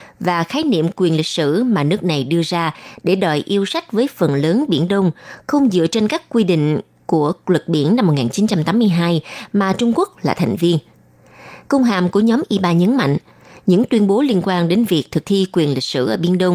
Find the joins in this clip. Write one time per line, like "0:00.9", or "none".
0:11.7